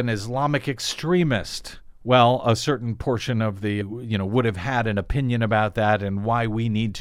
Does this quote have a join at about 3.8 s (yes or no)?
yes